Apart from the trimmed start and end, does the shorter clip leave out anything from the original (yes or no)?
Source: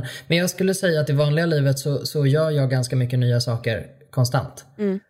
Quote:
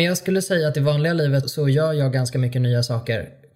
yes